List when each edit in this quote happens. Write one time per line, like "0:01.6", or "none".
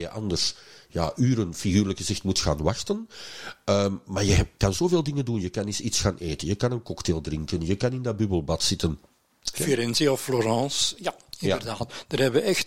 0:09.5